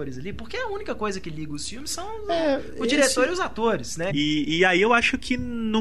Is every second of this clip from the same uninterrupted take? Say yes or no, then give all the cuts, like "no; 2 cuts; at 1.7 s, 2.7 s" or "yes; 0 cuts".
no; 1 cut; at 4.1 s